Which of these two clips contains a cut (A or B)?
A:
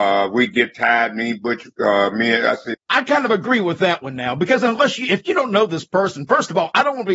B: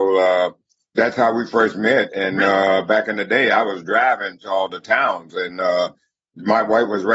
A